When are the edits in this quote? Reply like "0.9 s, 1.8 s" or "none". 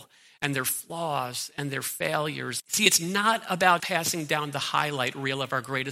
2.6 s, 3.8 s